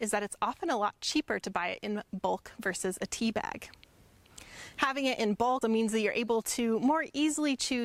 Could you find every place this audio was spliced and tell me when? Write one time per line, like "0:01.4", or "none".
0:05.6